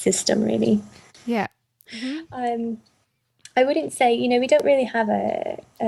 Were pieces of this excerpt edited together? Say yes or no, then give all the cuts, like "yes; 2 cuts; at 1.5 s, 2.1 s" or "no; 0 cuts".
yes; 1 cut; at 1.9 s